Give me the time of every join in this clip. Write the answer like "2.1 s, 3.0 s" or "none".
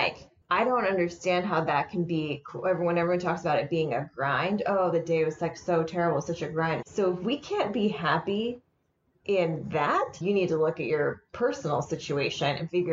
6.8 s, 10.2 s